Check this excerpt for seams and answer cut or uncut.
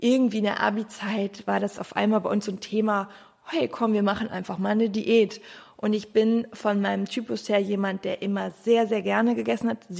uncut